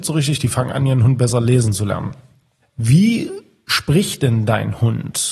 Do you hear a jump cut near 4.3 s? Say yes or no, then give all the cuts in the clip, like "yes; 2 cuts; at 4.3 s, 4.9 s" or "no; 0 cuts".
no; 1 cut; at 2.6 s